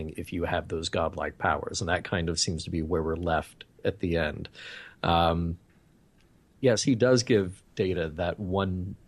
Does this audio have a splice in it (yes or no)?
yes